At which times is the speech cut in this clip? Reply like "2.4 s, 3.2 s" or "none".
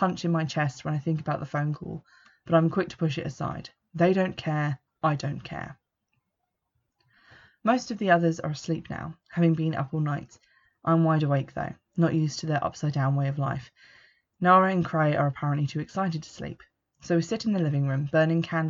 none

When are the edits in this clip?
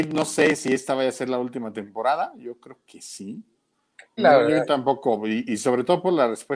4.2 s

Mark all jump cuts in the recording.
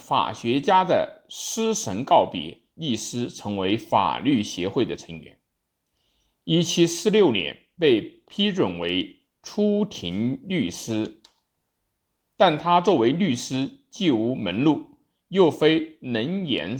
8.3 s

